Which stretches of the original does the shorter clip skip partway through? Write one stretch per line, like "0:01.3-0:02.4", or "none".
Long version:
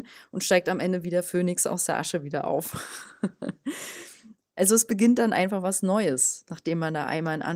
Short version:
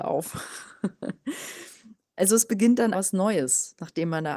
0:05.3-0:05.6